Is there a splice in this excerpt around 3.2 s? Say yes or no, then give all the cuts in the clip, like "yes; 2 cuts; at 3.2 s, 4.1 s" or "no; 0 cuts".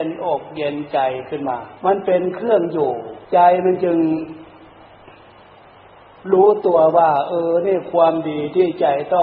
yes; 2 cuts; at 1.8 s, 3.2 s